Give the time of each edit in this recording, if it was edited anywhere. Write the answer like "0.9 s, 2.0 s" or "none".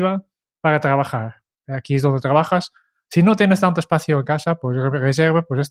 1.5 s